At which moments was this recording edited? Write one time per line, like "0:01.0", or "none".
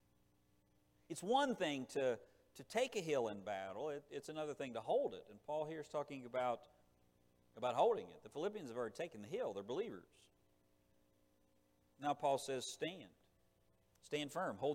none